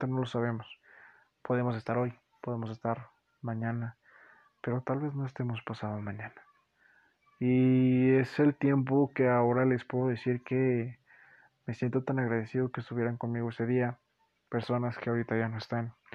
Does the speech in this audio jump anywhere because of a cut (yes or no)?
no